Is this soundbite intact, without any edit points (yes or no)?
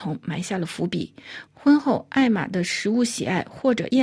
yes